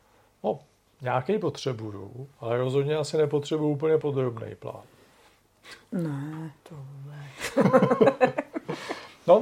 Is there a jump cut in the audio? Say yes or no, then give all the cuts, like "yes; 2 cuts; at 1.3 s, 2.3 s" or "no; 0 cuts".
no; 0 cuts